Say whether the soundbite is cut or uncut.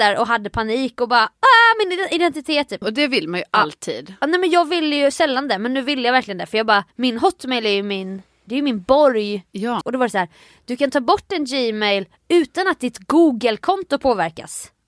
cut